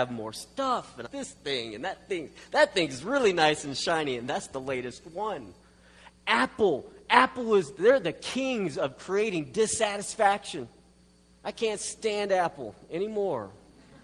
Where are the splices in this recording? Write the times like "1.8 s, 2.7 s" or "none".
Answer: 1.1 s